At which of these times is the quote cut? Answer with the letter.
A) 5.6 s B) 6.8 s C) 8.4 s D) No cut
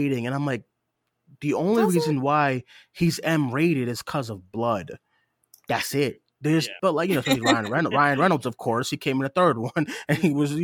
B